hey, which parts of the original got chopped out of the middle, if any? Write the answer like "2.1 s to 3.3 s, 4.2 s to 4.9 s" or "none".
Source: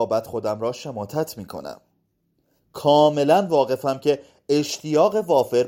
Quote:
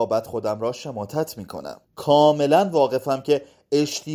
1.8 s to 2.6 s